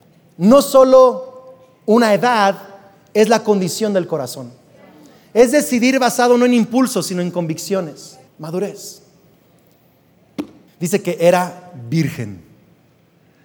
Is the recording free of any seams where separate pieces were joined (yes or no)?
no